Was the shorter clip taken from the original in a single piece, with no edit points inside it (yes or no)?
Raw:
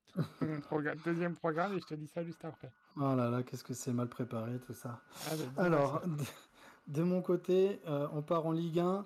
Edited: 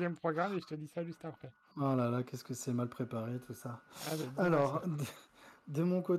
yes